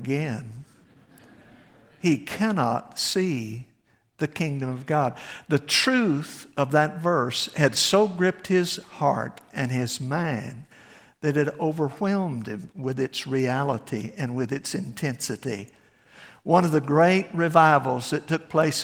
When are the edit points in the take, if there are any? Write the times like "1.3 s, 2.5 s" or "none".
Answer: none